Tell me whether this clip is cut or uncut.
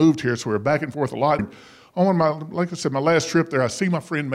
cut